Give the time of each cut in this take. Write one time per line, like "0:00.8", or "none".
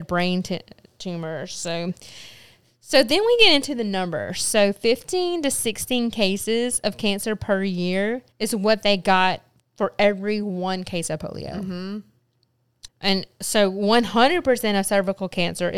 0:08.3
0:12.9